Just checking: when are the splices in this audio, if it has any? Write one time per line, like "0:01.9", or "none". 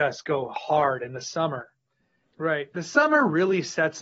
0:02.2

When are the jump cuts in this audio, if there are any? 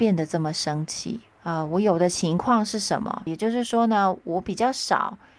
0:01.4
0:03.3

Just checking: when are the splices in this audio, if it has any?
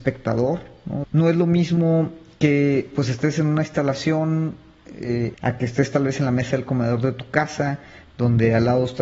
0:01.0
0:05.3

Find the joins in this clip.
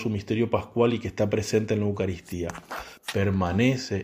0:03.0

